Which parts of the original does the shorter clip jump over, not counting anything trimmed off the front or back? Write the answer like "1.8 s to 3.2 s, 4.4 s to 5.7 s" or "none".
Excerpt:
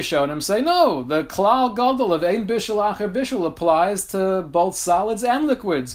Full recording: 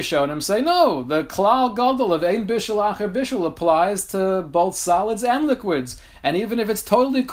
none